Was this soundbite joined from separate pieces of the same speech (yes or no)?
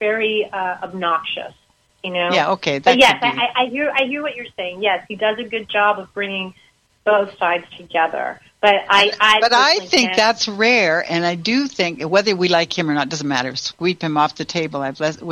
no